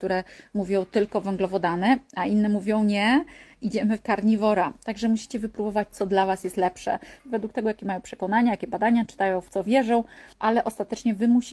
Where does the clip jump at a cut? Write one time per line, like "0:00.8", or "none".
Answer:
0:07.2
0:10.3